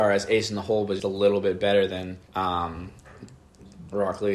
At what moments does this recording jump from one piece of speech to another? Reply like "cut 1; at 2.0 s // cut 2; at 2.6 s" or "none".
cut 1; at 1.0 s // cut 2; at 2.3 s